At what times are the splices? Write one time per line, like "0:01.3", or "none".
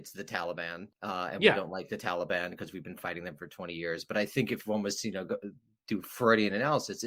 0:00.9